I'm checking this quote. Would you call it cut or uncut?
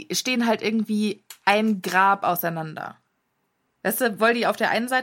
uncut